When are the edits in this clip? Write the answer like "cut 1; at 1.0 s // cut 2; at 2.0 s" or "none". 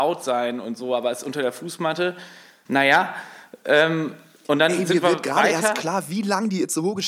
cut 1; at 2.7 s